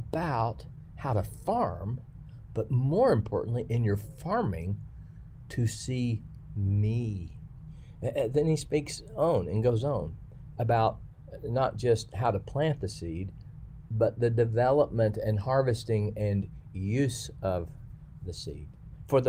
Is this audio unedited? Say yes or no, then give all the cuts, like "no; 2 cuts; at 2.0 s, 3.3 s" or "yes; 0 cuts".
yes; 0 cuts